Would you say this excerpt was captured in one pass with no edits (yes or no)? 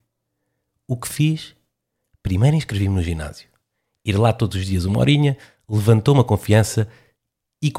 yes